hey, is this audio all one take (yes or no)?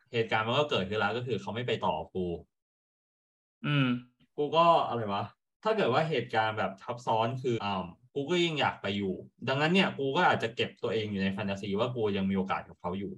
no